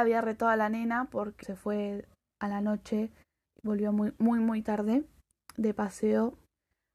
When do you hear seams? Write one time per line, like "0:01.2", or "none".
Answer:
0:01.4

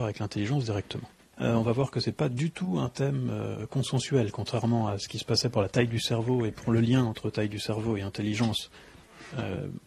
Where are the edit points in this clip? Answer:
0:01.3

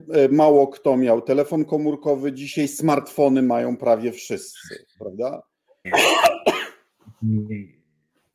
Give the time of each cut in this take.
0:05.8

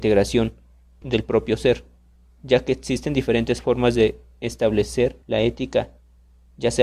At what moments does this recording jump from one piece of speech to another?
0:01.0
0:05.2

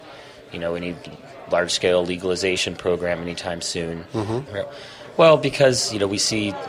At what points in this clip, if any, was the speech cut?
0:04.5

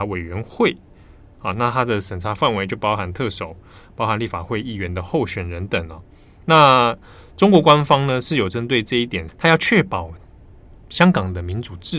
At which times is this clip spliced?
0:05.7
0:09.3

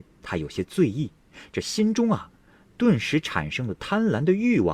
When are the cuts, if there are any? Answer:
none

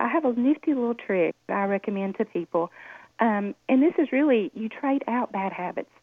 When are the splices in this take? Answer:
none

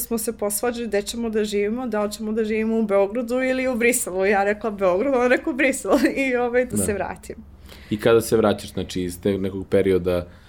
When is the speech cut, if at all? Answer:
0:06.7

